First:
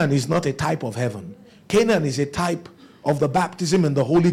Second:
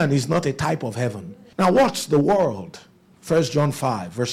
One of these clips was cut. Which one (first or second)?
second